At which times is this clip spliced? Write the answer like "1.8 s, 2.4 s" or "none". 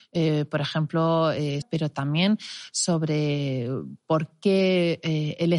1.6 s